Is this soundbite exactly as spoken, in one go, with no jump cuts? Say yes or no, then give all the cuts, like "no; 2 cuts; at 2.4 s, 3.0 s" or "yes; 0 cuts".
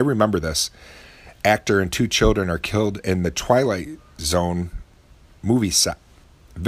yes; 0 cuts